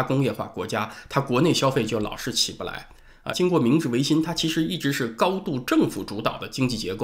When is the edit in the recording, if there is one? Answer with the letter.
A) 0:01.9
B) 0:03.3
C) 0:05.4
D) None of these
B